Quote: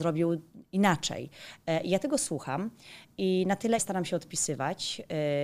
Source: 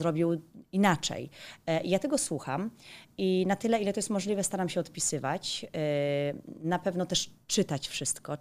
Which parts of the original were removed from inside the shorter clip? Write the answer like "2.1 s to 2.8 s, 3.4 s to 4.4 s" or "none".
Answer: 3.8 s to 4.4 s

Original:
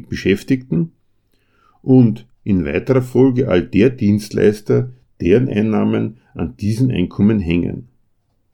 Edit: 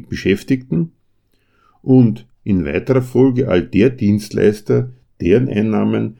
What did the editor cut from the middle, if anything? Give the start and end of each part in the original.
none

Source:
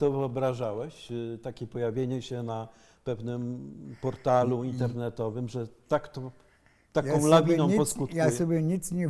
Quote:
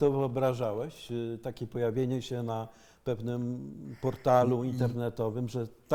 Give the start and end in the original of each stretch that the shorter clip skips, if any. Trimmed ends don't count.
none

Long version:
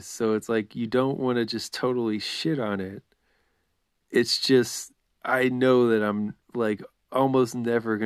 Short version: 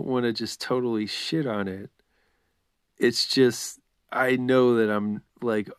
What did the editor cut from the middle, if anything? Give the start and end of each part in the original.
none

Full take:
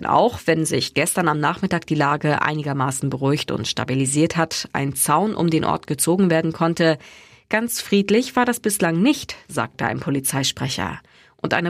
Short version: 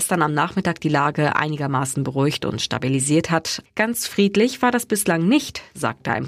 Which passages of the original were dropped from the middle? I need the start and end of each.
4.7 s to 7.4 s

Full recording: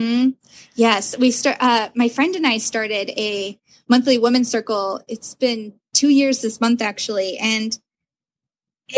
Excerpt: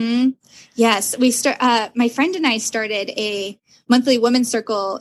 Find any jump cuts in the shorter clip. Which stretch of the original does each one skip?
none

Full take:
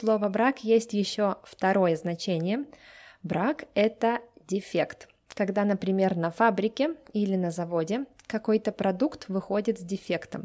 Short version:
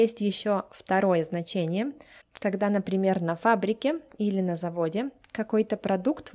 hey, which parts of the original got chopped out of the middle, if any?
2.9 s to 5.2 s

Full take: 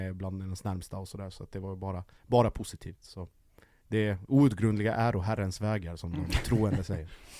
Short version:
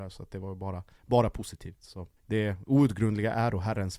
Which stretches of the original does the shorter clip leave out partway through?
3.4 s to 3.8 s

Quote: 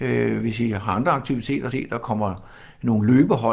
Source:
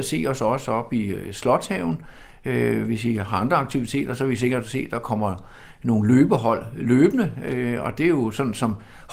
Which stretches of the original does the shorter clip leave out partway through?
4.2 s to 4.7 s

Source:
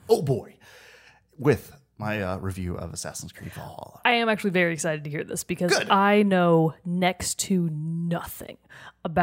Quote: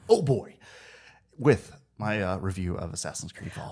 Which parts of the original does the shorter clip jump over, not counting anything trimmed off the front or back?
none

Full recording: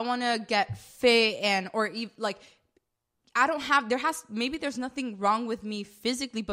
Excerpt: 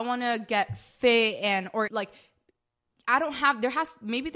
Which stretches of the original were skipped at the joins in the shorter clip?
1.9 s to 2.2 s

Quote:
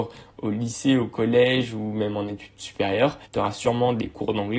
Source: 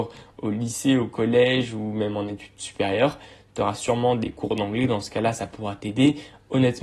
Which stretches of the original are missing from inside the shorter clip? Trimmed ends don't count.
3.3 s to 3.5 s

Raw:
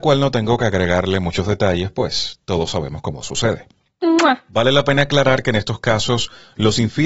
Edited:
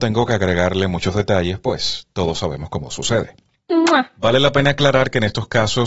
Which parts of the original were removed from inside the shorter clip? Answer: none

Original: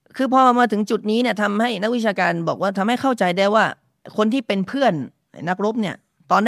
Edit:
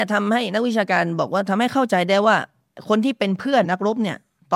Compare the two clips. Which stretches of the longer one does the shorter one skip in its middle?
4.9 s to 5.4 s

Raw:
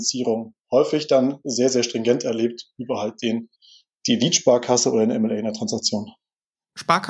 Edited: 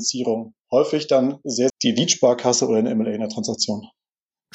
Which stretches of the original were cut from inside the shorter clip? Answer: 1.7 s to 3.9 s

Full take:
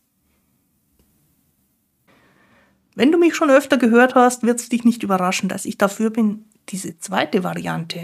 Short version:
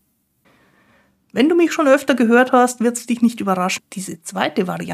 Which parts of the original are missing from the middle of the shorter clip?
5.4 s to 6.5 s

